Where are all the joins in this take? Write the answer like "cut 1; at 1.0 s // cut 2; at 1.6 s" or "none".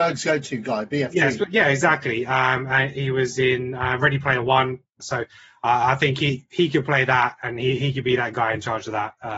cut 1; at 5.0 s